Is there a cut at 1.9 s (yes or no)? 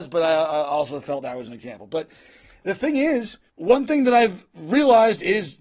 no